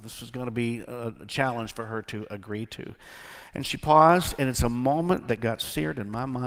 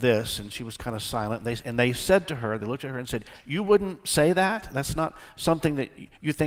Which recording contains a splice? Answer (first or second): first